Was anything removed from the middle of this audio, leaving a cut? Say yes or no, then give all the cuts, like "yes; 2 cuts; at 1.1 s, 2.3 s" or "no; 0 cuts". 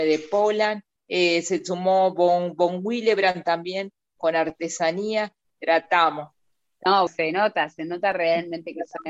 yes; 3 cuts; at 1.0 s, 5.4 s, 7.1 s